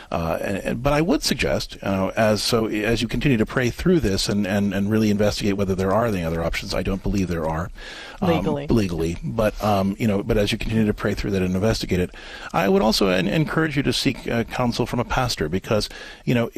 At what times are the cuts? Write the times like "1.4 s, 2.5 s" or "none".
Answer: none